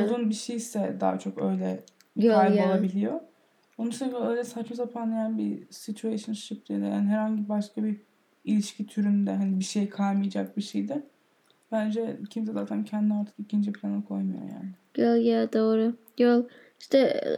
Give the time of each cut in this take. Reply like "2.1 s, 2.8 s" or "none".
none

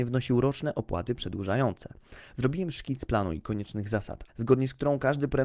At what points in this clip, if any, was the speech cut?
2.3 s, 4.3 s

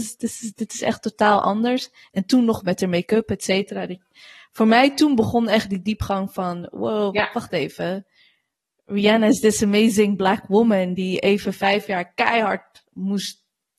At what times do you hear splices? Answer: none

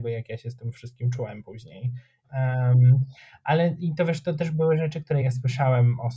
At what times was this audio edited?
2.2 s, 5.2 s

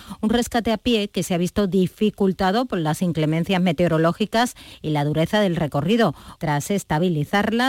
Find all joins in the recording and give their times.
6.4 s

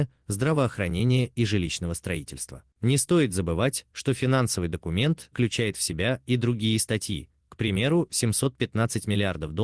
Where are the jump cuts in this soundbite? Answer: 5.3 s

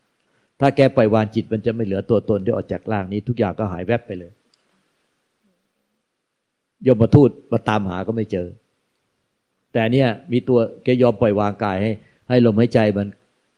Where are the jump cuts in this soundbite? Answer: none

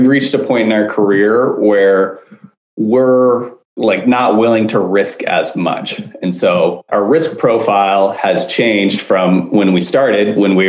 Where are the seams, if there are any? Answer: none

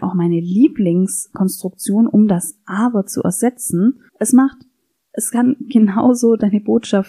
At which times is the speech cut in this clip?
4.1 s

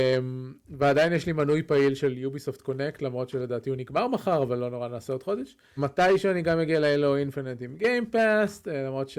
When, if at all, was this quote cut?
5.8 s

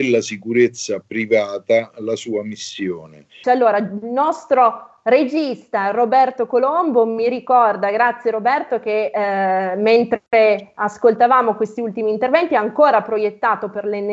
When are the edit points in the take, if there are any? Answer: 3.4 s

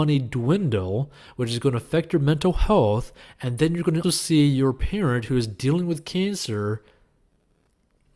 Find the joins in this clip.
4.0 s

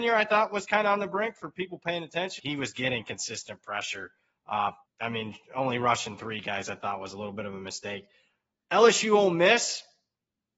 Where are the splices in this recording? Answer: 2.4 s, 4.9 s

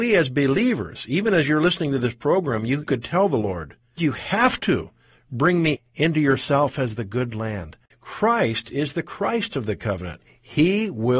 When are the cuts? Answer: 4.0 s, 7.9 s

